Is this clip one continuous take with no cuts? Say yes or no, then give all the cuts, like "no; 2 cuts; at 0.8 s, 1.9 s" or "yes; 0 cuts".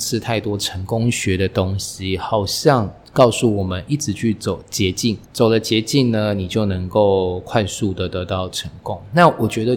no; 1 cut; at 5.2 s